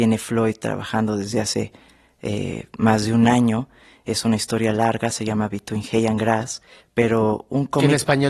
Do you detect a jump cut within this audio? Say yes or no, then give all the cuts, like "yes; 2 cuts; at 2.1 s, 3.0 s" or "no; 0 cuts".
no; 0 cuts